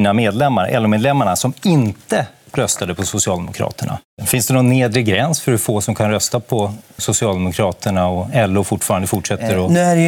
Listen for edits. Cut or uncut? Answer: cut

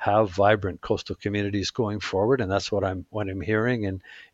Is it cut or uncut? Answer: uncut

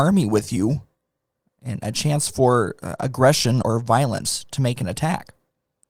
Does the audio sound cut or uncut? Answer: cut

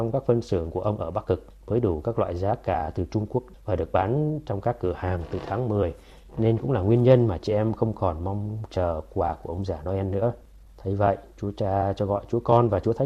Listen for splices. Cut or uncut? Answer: uncut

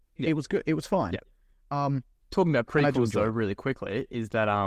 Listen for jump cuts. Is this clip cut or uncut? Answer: uncut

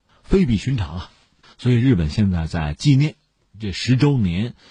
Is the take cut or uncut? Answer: cut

